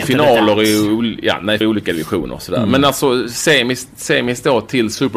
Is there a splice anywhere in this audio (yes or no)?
yes